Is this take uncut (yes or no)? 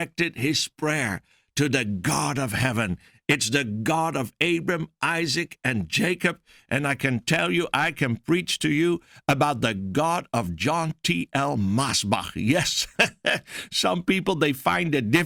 yes